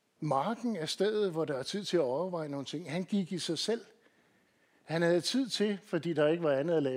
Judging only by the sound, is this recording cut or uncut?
uncut